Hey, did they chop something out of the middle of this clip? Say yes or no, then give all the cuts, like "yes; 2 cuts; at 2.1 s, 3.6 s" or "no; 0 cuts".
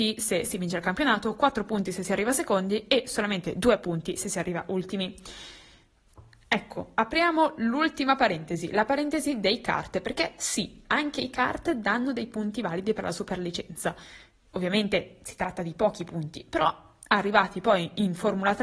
no; 0 cuts